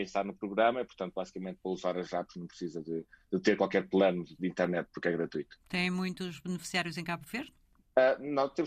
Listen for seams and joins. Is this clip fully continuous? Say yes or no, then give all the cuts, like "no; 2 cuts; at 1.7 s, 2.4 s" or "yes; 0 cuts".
no; 2 cuts; at 4.4 s, 5.6 s